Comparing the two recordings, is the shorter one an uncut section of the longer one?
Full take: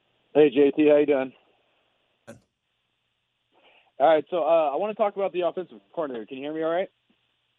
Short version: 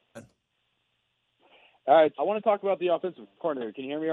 no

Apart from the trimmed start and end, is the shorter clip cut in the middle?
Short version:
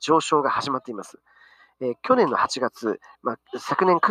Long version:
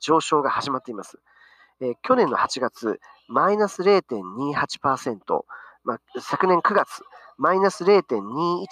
yes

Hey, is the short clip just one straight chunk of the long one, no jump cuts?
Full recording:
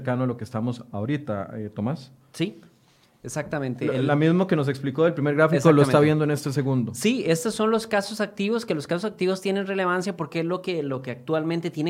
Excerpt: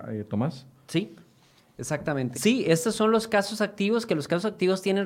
no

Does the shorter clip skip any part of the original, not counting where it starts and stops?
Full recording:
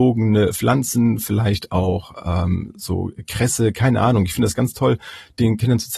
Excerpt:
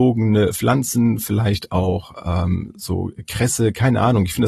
no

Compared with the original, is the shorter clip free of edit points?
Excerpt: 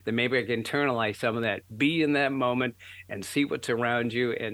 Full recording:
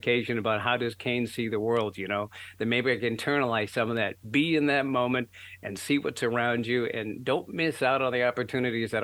yes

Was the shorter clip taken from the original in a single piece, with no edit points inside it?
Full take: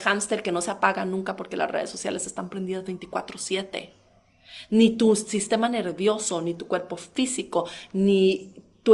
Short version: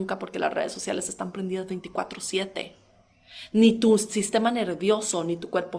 yes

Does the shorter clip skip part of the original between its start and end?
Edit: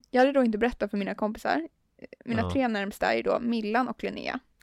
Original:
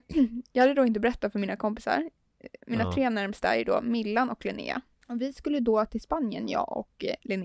no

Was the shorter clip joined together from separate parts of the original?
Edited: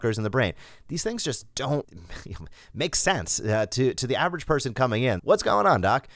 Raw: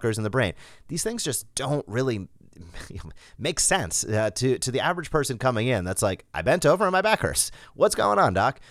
yes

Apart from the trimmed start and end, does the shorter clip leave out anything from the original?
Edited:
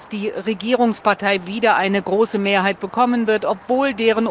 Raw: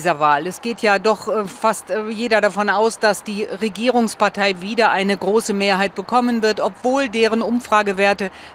no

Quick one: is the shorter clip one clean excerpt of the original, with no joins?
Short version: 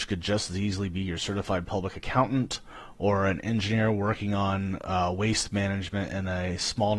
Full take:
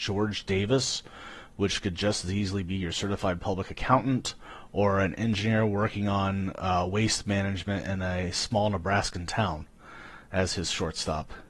yes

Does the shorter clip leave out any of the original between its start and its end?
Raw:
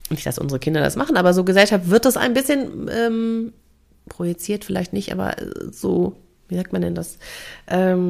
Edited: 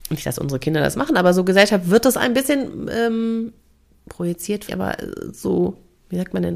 yes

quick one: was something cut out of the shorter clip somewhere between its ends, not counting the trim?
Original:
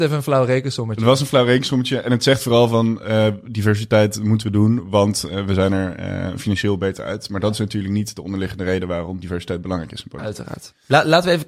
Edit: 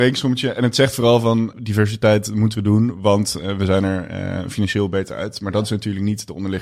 yes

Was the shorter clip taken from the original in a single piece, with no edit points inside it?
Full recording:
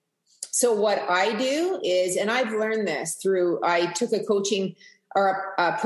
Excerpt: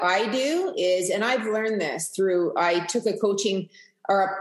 yes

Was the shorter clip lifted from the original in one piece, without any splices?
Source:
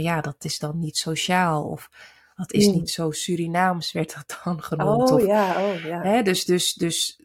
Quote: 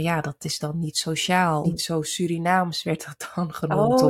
no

